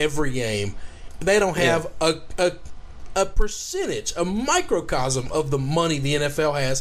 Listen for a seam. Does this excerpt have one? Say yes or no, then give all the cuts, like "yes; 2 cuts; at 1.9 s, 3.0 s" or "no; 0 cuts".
no; 0 cuts